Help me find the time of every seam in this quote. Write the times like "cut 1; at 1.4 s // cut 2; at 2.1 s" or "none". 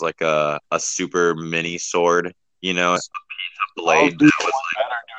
cut 1; at 3.0 s